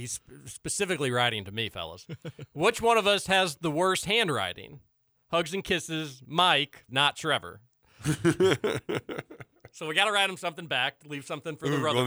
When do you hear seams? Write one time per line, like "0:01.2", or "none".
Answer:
0:06.9